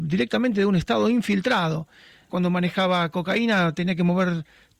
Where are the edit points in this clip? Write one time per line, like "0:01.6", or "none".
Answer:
0:02.3